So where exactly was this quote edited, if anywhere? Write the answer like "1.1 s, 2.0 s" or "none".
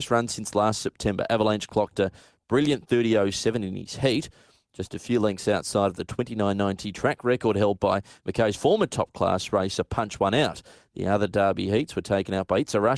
none